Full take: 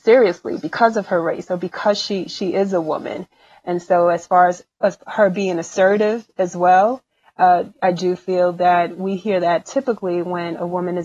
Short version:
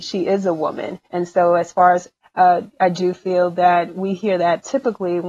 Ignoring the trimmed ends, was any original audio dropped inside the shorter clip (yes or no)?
yes